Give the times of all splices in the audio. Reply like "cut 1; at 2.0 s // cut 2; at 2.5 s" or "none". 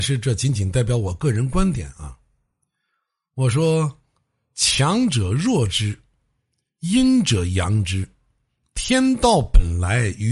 none